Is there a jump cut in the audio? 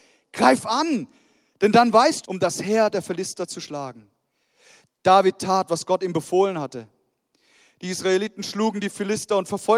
yes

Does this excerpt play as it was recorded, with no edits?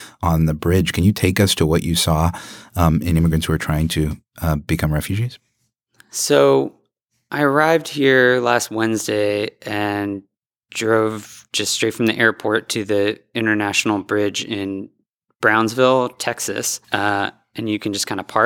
no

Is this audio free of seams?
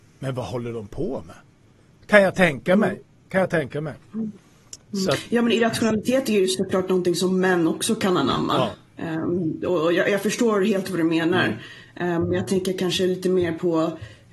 yes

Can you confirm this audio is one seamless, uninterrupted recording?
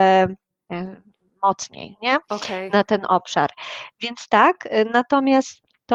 yes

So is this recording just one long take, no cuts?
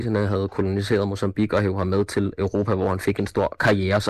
yes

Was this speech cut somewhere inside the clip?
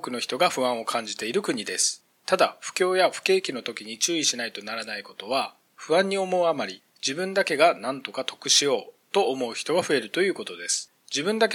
no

